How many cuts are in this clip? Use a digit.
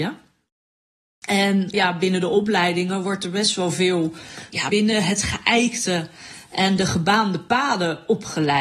2